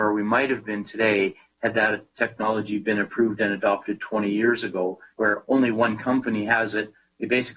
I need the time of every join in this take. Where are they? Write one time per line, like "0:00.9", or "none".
0:05.1